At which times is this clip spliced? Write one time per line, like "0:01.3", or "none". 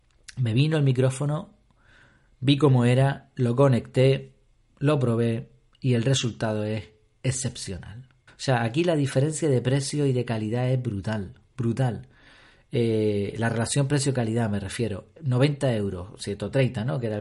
0:08.3